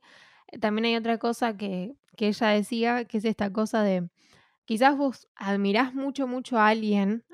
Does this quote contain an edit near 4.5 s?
no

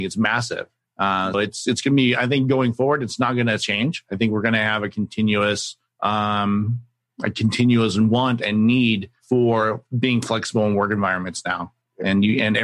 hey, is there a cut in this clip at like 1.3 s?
yes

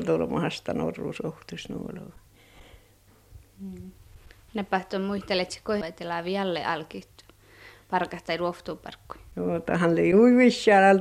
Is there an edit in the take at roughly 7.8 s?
no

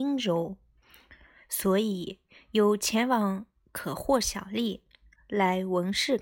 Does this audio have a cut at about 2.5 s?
no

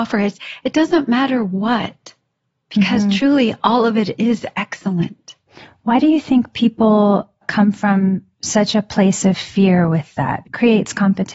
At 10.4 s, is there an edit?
yes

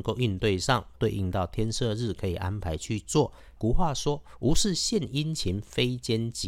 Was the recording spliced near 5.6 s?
no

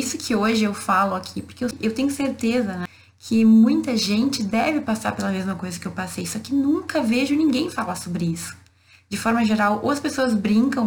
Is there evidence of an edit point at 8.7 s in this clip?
no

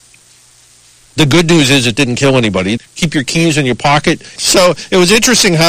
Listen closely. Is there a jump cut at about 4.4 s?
yes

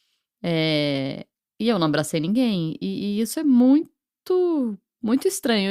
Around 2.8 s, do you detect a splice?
no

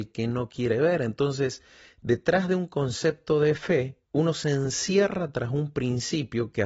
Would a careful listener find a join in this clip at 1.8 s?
no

